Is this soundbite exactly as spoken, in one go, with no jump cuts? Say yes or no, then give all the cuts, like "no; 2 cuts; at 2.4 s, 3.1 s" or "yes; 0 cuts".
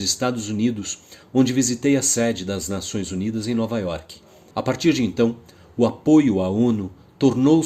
no; 1 cut; at 4.5 s